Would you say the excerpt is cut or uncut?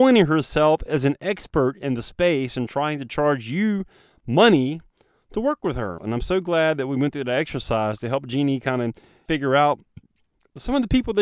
cut